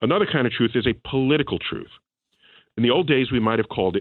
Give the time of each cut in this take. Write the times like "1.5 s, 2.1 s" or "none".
none

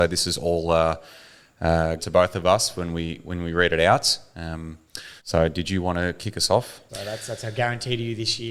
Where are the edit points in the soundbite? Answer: 2.0 s, 5.2 s, 6.9 s

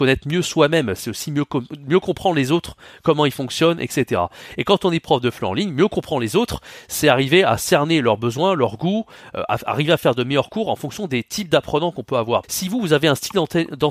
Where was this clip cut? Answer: 12.4 s

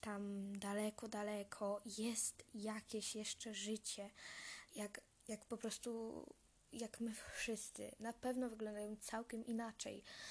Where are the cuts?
4.7 s

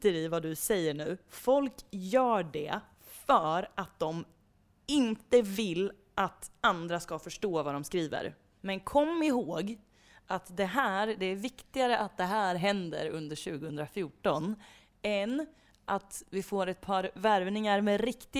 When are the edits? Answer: 8.6 s

